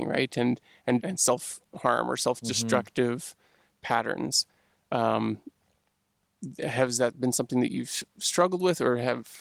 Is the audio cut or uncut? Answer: cut